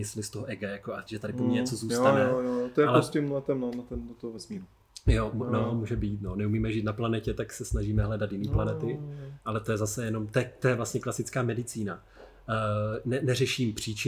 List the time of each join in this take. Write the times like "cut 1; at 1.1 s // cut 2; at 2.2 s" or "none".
cut 1; at 1.1 s